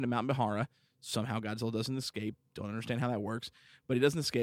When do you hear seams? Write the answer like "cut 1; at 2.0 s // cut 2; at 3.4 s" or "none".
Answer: none